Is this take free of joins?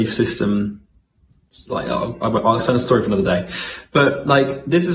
yes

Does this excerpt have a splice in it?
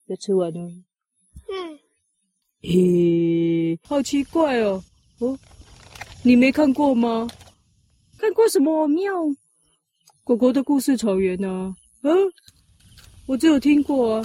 yes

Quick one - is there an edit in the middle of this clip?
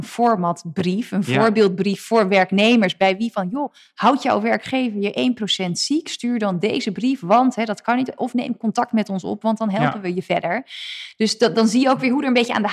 no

